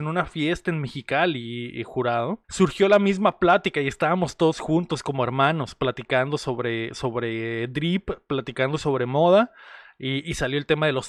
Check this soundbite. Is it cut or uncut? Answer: cut